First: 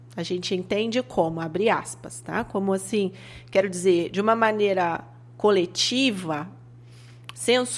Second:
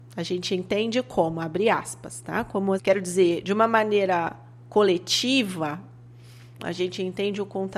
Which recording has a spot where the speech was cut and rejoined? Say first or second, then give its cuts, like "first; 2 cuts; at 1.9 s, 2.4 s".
second; 2 cuts; at 2.8 s, 6.6 s